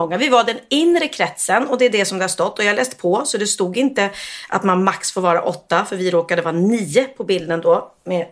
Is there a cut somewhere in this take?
no; 0 cuts

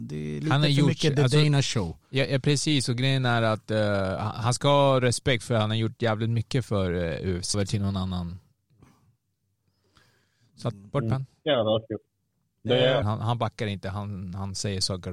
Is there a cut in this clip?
yes; 2 cuts; at 7.5 s, 13.0 s

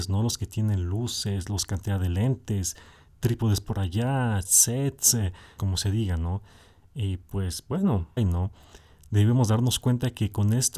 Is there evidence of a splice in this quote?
yes; 2 cuts; at 5.6 s, 8.2 s

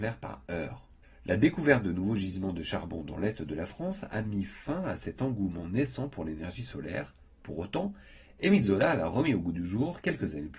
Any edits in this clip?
no; 0 cuts

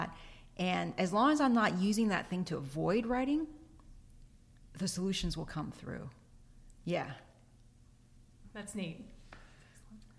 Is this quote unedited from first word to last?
no; 1 cut; at 4.7 s

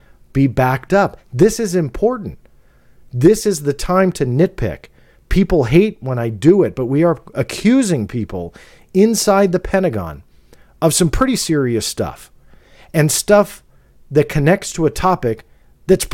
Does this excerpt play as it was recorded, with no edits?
yes; 0 cuts

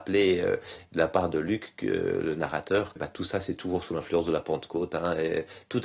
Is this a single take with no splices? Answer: no; 1 cut; at 3.0 s

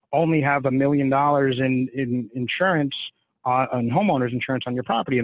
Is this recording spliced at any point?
no; 0 cuts

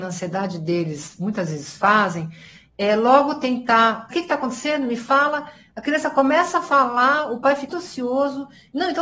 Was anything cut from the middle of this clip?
yes; 2 cuts; at 4.1 s, 7.7 s

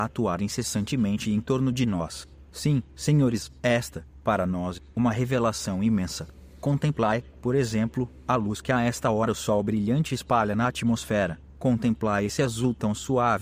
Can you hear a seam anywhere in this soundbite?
no; 0 cuts

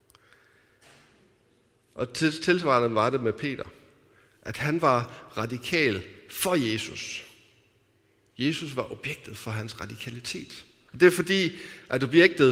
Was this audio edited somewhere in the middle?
yes; 1 cut; at 10.9 s

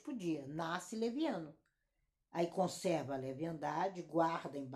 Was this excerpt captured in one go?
yes; 0 cuts

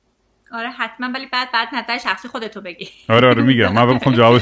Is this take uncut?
yes; 0 cuts

